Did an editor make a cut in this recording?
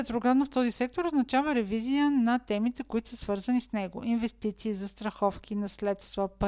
no; 0 cuts

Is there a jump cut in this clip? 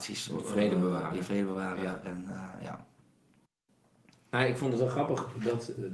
no; 0 cuts

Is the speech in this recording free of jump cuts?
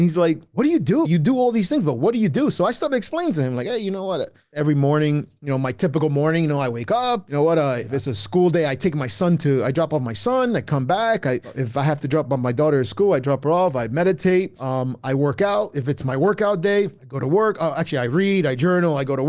no; 1 cut; at 1.0 s

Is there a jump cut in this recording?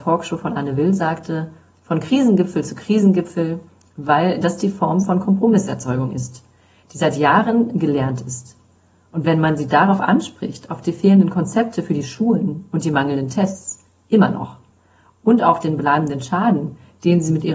no; 0 cuts

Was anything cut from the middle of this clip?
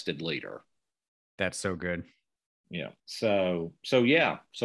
yes; 1 cut; at 3.0 s

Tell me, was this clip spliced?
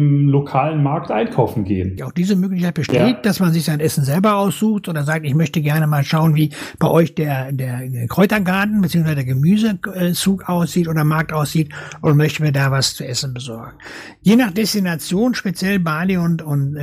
yes; 1 cut; at 2.0 s

